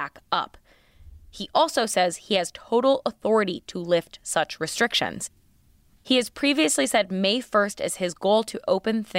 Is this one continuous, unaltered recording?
yes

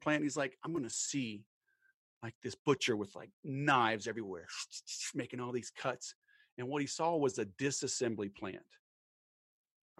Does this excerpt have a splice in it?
no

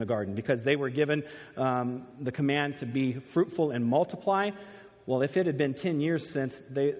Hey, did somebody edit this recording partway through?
no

